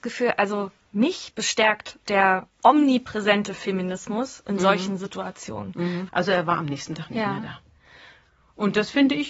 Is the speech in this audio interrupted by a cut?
yes; 2 cuts; at 2.5 s, 6.1 s

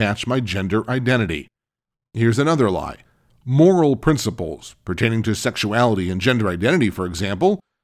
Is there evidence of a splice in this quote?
no; 0 cuts

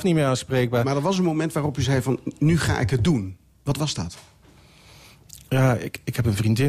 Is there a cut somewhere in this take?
no; 0 cuts

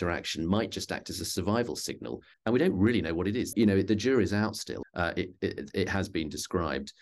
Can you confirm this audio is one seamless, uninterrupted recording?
no; 3 cuts; at 2.3 s, 3.5 s, 4.8 s

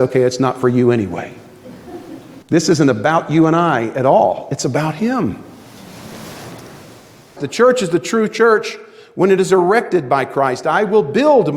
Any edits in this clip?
yes; 2 cuts; at 2.4 s, 7.4 s

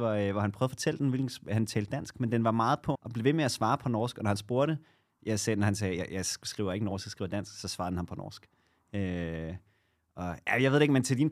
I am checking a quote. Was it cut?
yes; 1 cut; at 2.9 s

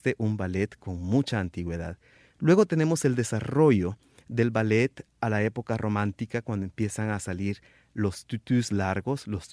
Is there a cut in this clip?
no; 0 cuts

